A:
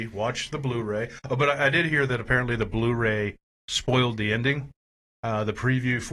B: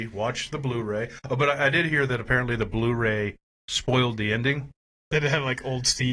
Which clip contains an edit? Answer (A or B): B